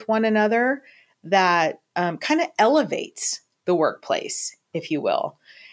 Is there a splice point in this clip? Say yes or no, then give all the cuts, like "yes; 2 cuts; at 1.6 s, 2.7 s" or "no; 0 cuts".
no; 0 cuts